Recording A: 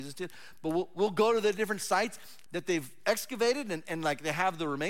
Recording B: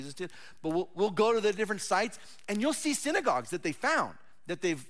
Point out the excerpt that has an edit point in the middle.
A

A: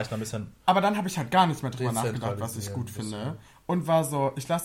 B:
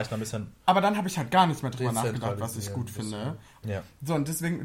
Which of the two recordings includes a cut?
B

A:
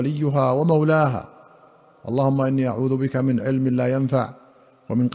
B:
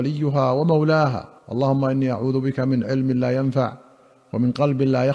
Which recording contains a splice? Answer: B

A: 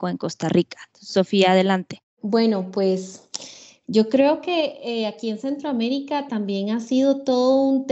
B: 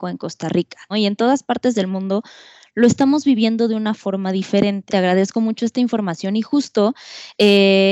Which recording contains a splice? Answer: B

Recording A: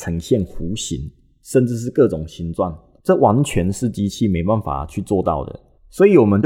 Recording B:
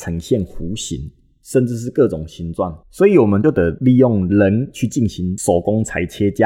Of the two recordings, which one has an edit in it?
B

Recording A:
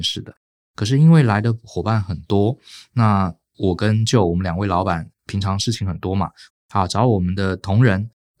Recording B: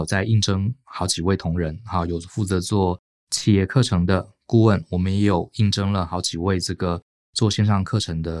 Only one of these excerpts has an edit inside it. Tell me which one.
A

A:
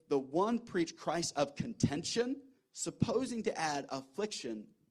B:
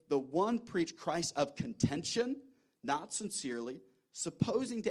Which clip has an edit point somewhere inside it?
A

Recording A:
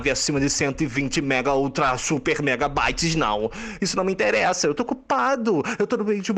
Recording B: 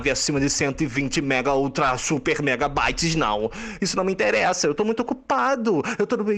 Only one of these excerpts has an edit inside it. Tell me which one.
A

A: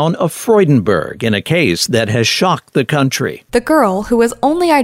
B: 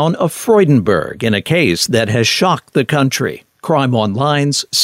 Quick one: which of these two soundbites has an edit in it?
A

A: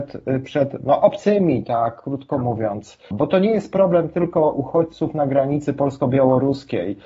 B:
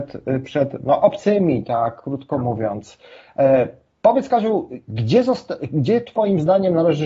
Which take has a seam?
A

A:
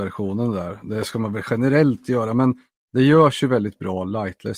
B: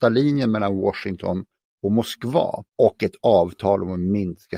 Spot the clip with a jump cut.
B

